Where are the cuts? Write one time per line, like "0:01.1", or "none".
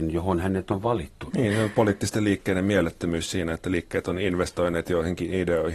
0:01.3